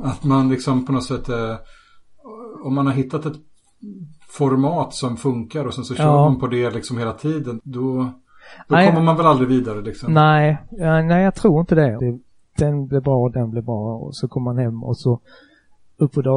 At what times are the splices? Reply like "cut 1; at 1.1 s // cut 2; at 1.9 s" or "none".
cut 1; at 7.6 s // cut 2; at 12.0 s // cut 3; at 14.0 s